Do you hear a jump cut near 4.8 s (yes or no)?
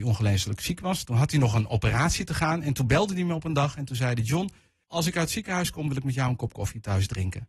yes